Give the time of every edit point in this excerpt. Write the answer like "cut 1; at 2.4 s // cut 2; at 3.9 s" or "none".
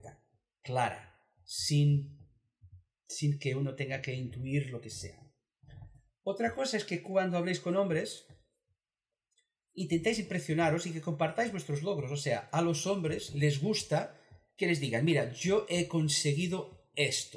none

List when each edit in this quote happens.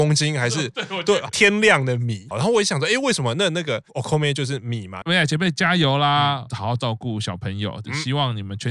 cut 1; at 2.3 s // cut 2; at 5.0 s

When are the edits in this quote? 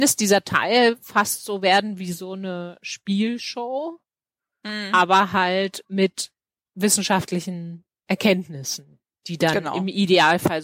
none

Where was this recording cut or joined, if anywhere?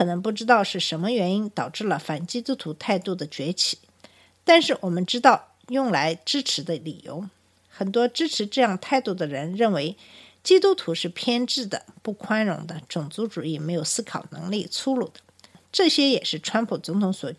none

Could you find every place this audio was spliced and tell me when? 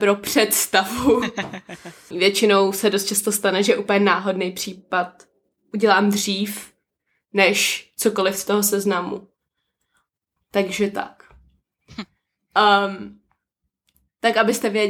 cut 1; at 2.1 s // cut 2; at 10.4 s

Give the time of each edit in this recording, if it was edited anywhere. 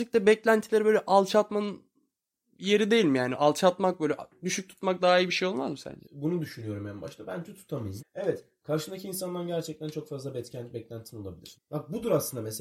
cut 1; at 6.0 s // cut 2; at 8.0 s // cut 3; at 11.5 s

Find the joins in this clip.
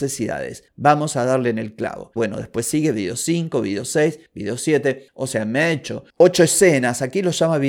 cut 1; at 2.2 s

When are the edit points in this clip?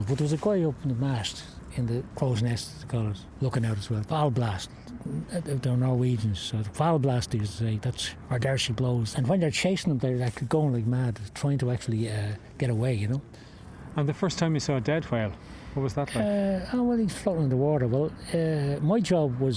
cut 1; at 4.0 s // cut 2; at 9.1 s

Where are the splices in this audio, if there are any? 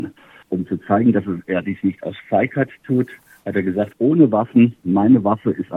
cut 1; at 3.9 s

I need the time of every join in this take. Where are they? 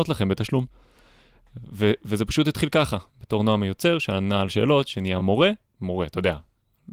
none

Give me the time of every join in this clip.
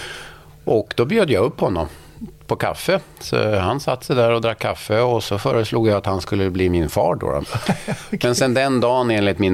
cut 1; at 7.4 s

